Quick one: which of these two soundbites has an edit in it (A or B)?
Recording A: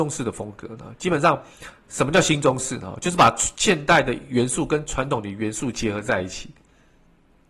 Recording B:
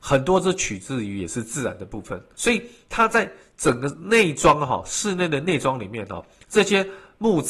B